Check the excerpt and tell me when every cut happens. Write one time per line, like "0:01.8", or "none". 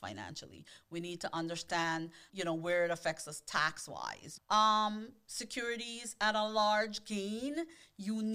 0:02.3
0:04.4